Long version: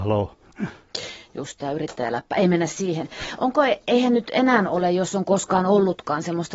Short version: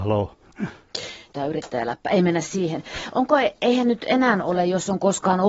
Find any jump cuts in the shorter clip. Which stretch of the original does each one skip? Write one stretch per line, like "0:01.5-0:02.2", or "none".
0:01.3-0:01.6